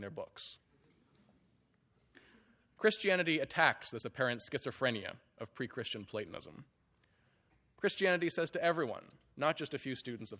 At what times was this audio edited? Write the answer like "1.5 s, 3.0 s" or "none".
none